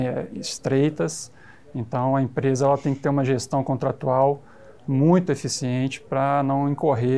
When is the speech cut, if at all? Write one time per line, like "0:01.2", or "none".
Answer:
none